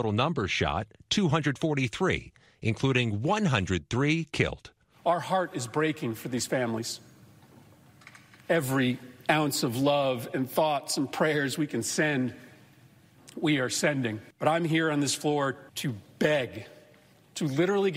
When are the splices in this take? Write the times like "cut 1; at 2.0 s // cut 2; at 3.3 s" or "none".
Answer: cut 1; at 14.3 s // cut 2; at 15.7 s